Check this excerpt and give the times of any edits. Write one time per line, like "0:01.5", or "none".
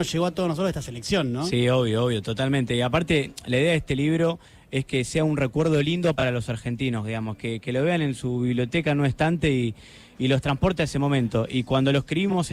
none